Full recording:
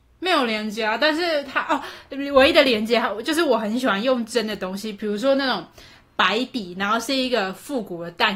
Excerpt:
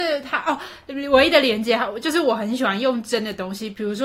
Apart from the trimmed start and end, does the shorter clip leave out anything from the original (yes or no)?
no